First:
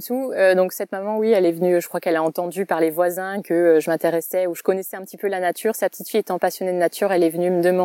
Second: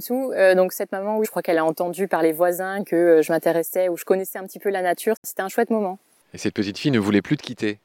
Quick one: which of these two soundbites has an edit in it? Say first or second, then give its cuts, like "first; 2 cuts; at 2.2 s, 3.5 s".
second; 2 cuts; at 1.2 s, 5.2 s